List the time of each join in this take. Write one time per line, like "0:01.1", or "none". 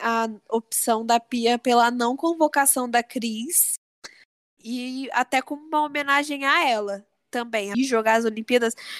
0:04.6
0:07.7